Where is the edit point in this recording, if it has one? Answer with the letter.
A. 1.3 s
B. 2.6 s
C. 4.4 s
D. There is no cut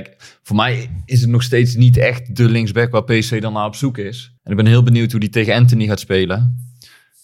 C